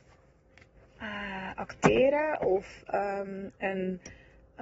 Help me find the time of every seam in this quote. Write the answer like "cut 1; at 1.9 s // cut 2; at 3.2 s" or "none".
none

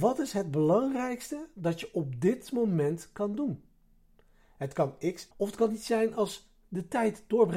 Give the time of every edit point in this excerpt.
cut 1; at 5.3 s

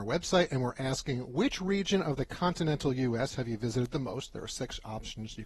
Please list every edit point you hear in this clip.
none

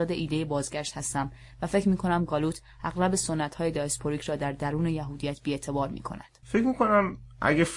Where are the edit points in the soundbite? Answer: cut 1; at 6.4 s

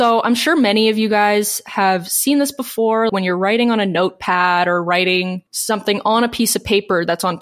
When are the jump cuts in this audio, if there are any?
cut 1; at 3.1 s // cut 2; at 5.5 s

